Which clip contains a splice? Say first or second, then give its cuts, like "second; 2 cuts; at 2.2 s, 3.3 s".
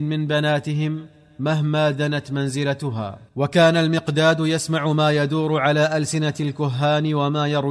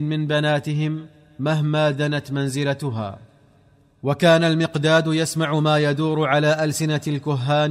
first; 1 cut; at 3.3 s